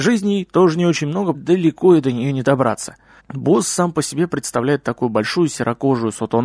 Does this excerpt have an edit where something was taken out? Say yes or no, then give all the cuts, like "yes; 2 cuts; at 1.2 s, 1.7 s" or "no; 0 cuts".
yes; 2 cuts; at 1.3 s, 3.2 s